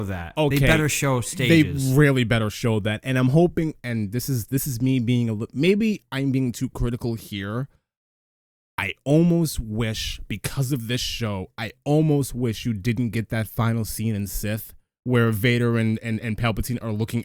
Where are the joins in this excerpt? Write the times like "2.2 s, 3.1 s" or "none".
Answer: none